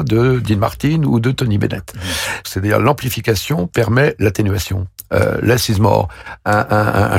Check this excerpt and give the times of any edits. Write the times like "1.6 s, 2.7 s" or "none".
2.4 s